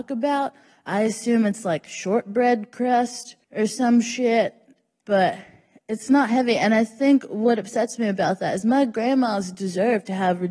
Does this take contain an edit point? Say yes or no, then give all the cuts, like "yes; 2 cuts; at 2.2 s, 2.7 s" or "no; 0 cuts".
yes; 1 cut; at 3.4 s